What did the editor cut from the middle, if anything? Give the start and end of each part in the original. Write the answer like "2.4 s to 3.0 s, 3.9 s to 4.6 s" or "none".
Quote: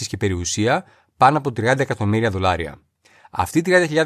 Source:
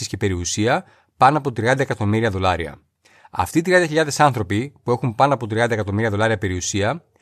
none